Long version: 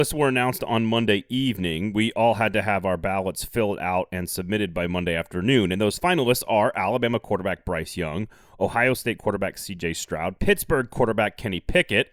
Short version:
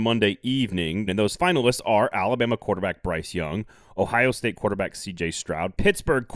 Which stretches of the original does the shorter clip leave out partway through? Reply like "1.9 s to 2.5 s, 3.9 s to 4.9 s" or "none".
1.9 s to 5.7 s